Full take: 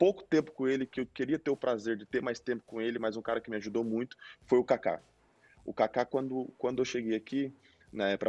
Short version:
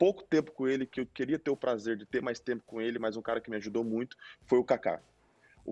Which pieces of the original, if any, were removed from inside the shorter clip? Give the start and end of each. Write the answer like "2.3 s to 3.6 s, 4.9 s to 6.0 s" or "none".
none